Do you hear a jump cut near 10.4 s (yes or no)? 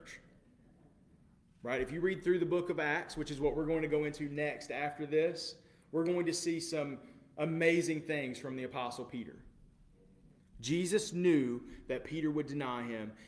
yes